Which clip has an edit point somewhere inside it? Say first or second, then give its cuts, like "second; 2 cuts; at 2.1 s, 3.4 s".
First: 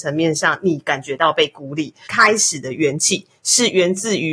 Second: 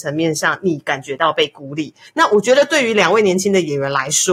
first; 1 cut; at 2.1 s